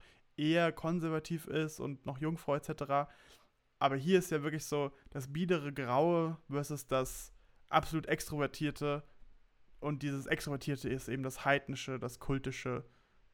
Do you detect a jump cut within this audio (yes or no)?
no